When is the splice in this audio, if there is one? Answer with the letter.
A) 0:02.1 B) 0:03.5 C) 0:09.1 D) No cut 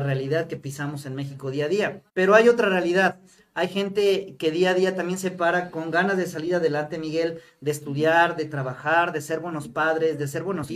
A